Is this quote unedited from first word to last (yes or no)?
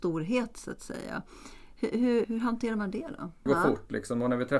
no